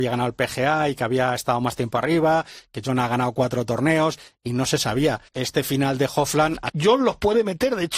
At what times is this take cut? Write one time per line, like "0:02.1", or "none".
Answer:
0:05.3
0:06.7